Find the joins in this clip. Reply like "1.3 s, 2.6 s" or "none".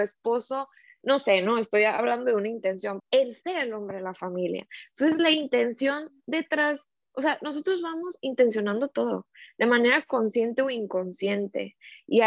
3.0 s